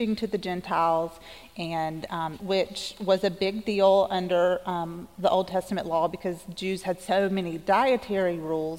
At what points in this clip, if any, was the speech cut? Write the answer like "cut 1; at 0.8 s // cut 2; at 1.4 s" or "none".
cut 1; at 2.4 s